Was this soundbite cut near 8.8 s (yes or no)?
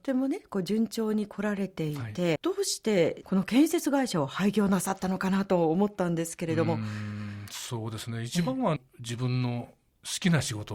yes